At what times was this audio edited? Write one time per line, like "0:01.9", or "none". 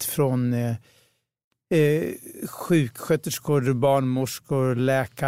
none

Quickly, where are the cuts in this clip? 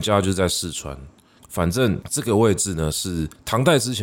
0:01.4

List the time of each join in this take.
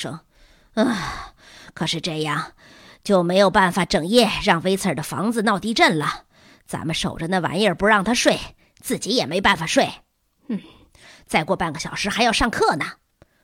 none

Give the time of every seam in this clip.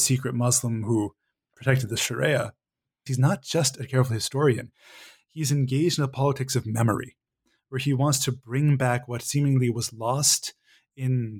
0:03.1

